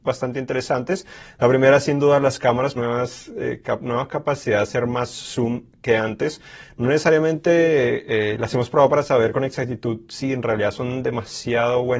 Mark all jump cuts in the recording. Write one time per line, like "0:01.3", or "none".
0:02.8